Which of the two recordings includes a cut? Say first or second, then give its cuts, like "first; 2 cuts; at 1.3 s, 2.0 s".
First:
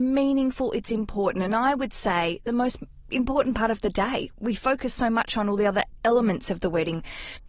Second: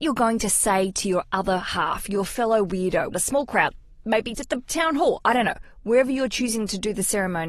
second; 2 cuts; at 3.1 s, 4.3 s